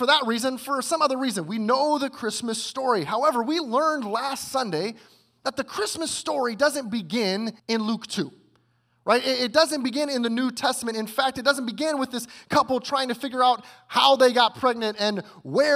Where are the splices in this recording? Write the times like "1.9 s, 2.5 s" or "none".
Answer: 7.6 s